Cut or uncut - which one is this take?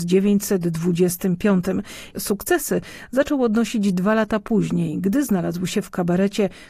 cut